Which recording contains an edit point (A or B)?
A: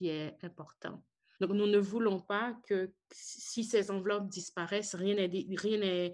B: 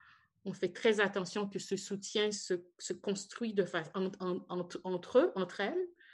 A